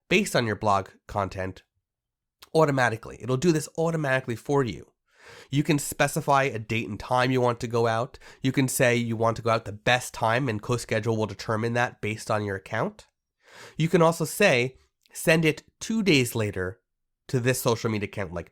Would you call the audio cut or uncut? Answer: uncut